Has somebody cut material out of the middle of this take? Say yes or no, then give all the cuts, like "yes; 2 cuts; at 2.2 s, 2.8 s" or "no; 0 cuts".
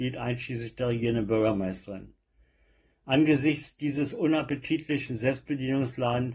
no; 0 cuts